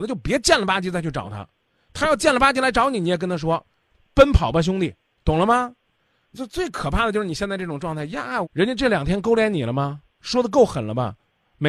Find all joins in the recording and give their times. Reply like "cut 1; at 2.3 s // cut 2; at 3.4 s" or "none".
cut 1; at 6.3 s // cut 2; at 8.4 s // cut 3; at 10.1 s